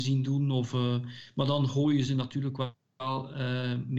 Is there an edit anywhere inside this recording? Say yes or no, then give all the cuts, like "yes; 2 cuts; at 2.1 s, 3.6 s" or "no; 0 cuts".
no; 0 cuts